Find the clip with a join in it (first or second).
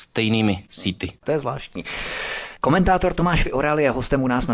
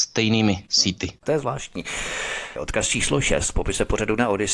second